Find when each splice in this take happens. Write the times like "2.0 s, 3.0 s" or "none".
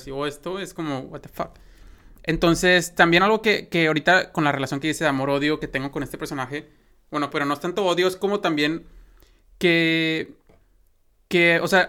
7.3 s